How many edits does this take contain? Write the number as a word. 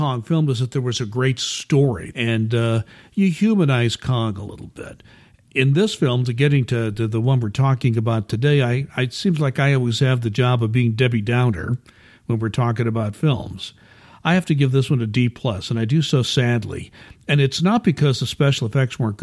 one